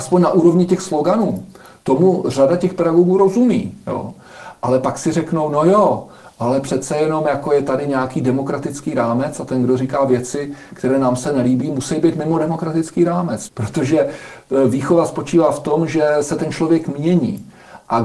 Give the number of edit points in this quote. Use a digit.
1